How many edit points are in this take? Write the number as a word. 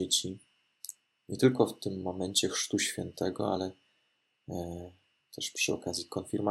zero